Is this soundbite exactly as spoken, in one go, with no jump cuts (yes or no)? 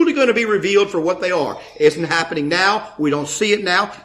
yes